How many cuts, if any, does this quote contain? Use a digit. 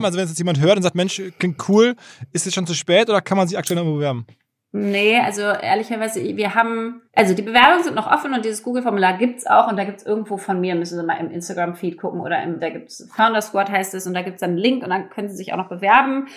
2